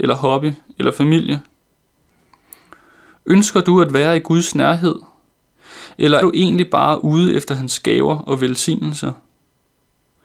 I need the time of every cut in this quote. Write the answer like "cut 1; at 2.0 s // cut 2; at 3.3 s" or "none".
cut 1; at 6.2 s